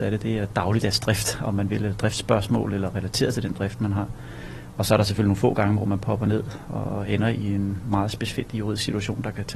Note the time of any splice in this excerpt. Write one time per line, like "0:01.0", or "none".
none